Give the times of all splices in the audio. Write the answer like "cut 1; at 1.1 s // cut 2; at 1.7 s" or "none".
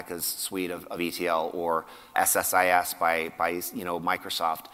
cut 1; at 2.1 s

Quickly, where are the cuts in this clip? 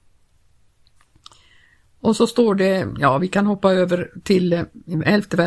none

